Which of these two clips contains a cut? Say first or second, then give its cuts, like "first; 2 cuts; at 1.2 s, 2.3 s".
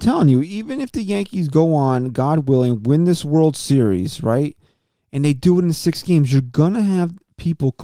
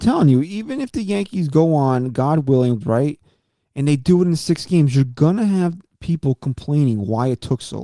second; 1 cut; at 2.8 s